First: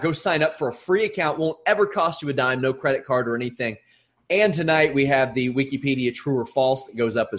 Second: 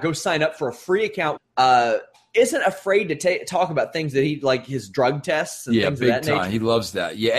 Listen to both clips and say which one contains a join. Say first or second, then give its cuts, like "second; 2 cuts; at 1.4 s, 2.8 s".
second; 1 cut; at 1.4 s